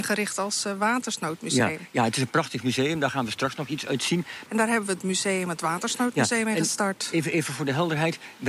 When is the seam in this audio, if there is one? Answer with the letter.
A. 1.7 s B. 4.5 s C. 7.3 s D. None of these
B